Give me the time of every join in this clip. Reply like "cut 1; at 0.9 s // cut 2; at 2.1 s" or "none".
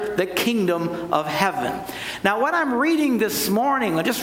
none